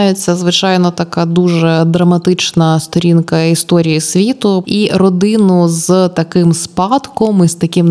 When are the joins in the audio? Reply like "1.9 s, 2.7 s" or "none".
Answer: 4.6 s

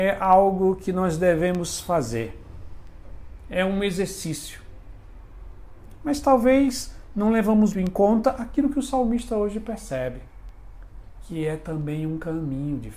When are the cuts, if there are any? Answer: 7.7 s

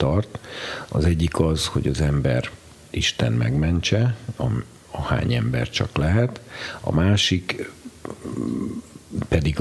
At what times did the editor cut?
none

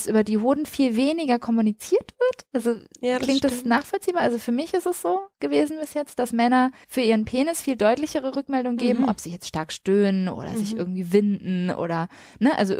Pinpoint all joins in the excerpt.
none

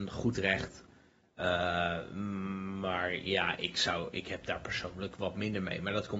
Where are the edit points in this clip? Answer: none

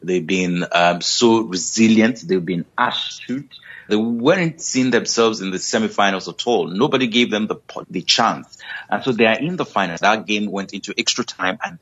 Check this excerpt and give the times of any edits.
3.9 s, 7.8 s, 10.0 s

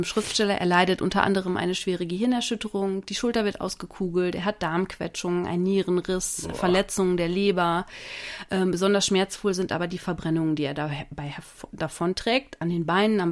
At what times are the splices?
none

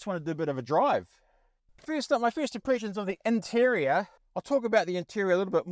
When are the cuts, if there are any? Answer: 1.7 s, 4.2 s

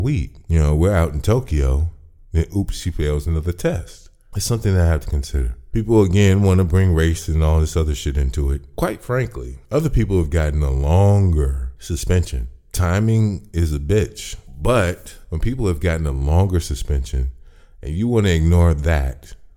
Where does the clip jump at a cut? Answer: none

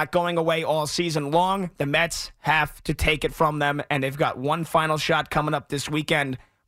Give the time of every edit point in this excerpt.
none

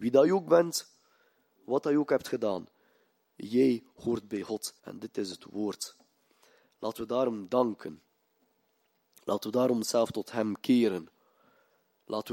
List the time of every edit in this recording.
4.8 s

